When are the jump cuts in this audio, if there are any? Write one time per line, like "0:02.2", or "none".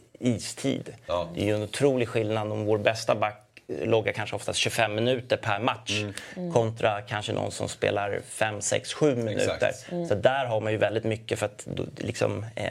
none